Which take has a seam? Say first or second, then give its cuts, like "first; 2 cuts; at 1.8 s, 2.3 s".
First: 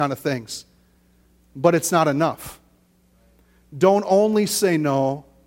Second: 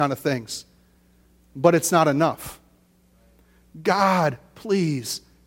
second; 1 cut; at 3.7 s